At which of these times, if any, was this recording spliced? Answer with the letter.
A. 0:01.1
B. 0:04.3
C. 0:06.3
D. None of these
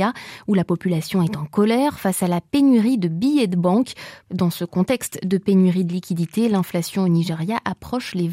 B